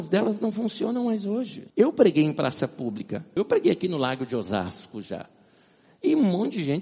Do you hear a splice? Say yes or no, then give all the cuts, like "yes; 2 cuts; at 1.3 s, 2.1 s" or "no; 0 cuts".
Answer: yes; 2 cuts; at 1.7 s, 3.4 s